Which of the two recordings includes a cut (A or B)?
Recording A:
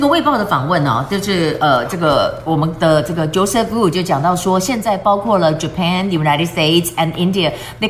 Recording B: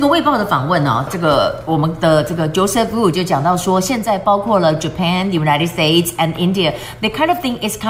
B